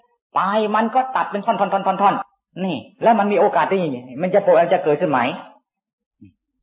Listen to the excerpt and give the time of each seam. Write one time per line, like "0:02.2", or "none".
0:02.2